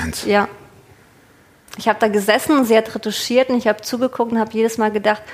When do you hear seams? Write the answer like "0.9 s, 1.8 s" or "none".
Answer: none

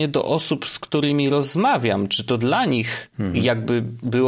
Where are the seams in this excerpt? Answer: none

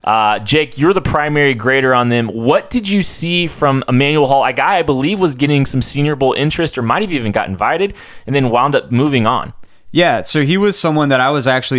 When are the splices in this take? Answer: none

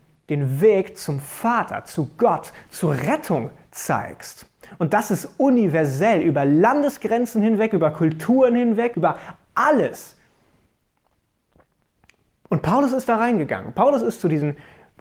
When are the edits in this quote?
8.9 s

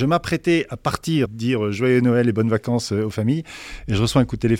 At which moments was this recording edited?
1.3 s

